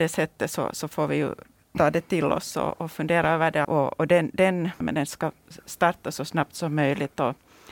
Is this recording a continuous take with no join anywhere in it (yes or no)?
no